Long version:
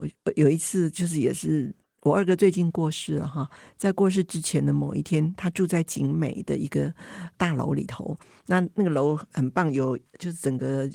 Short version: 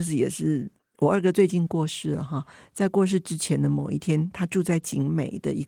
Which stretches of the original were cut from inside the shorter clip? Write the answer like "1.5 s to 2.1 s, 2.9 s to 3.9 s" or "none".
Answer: none